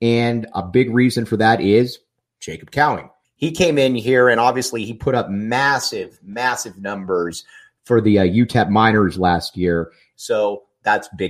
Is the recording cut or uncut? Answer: cut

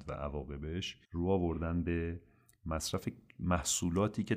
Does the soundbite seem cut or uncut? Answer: cut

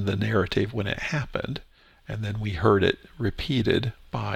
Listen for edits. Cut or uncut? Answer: uncut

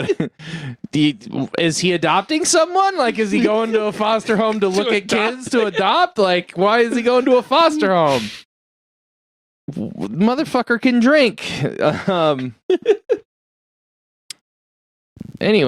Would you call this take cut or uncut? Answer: uncut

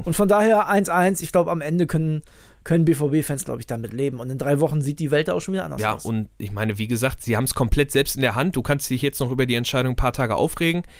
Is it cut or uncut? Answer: uncut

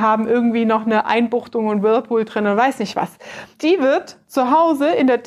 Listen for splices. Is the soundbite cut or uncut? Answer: cut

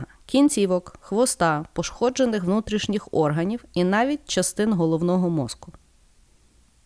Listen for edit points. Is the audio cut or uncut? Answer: uncut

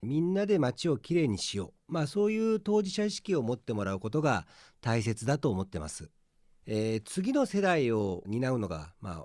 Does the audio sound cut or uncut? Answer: uncut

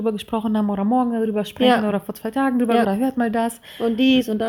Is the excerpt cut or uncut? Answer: cut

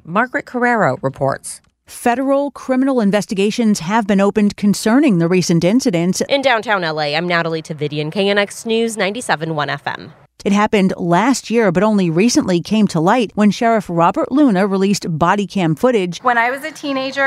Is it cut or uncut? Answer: cut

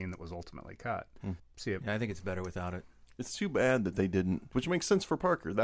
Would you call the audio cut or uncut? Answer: cut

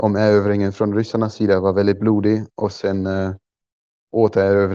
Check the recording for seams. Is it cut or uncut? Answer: uncut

